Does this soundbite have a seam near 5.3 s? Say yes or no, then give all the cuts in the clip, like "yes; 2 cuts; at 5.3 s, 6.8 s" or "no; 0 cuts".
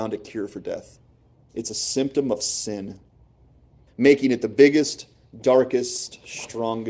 no; 2 cuts; at 1.5 s, 3.9 s